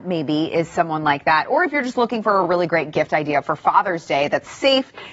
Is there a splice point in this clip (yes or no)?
no